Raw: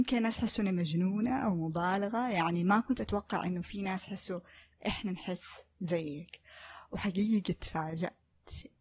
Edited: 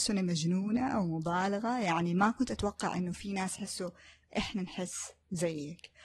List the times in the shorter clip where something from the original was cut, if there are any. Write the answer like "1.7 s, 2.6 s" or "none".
none